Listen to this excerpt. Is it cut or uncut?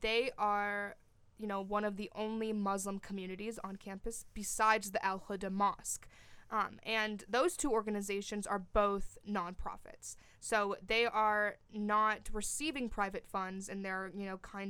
uncut